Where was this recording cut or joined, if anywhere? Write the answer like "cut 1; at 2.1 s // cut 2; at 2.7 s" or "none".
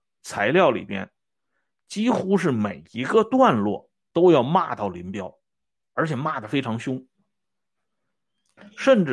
none